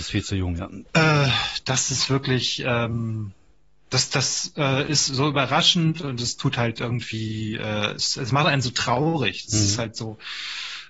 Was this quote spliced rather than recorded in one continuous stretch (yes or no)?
no